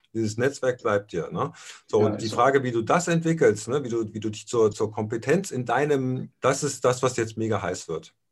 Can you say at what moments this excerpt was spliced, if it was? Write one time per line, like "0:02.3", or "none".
0:04.7
0:06.3